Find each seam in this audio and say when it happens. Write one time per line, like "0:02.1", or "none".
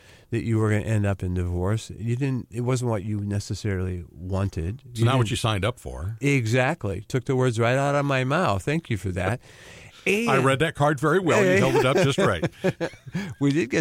none